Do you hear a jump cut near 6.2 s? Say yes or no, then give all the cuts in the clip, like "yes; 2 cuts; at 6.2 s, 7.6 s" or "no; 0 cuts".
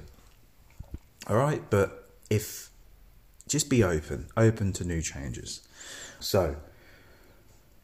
yes; 1 cut; at 6.2 s